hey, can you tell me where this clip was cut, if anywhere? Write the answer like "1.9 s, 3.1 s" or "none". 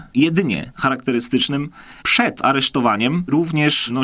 2.0 s